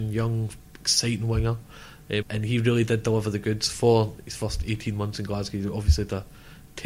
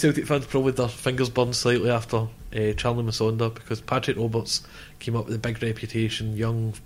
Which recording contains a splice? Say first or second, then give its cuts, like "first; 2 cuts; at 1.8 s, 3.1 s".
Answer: first; 1 cut; at 2.2 s